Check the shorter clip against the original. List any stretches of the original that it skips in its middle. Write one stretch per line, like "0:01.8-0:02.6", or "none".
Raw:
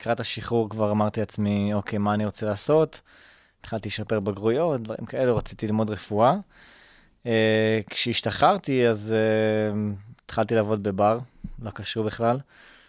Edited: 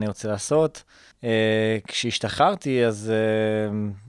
0:03.3-0:07.1